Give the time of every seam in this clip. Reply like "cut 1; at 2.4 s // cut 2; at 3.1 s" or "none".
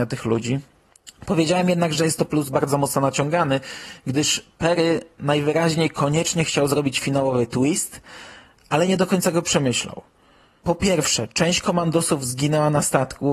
none